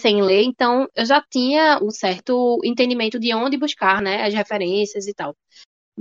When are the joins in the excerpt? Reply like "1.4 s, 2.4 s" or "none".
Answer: 1.8 s